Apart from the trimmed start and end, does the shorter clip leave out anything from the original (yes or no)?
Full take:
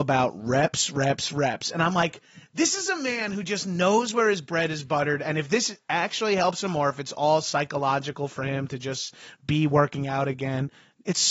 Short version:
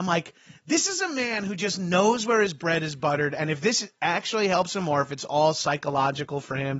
no